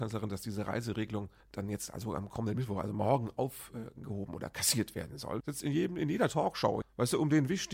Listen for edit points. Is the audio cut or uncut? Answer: cut